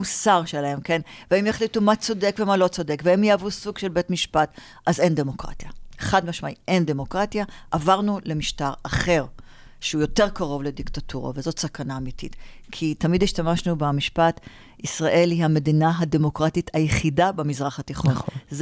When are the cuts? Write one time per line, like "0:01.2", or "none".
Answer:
none